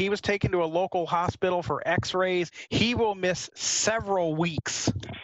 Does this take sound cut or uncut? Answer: uncut